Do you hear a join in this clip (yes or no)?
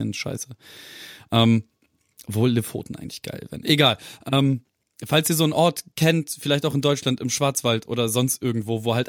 no